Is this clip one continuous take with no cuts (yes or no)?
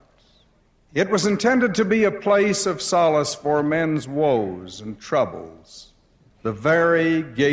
yes